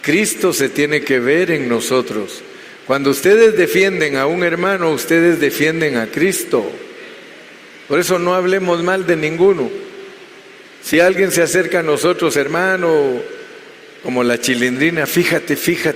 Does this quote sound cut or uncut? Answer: uncut